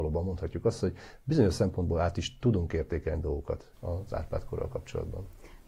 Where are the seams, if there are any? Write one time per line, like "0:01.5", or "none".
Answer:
0:03.7